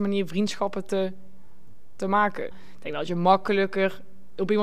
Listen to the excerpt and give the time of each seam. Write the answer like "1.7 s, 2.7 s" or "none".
2.5 s